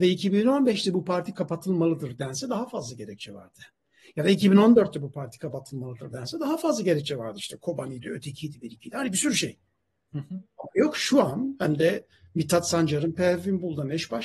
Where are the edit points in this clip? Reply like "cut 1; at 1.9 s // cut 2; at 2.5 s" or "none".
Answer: none

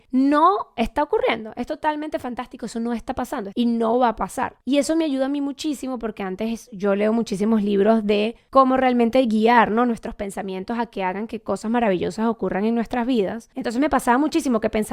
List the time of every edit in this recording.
cut 1; at 3.5 s

